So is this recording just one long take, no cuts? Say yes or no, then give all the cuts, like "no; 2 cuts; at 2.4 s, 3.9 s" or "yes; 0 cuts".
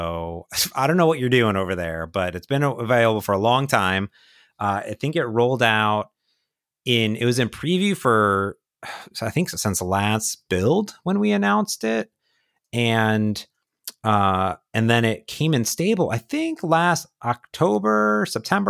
yes; 0 cuts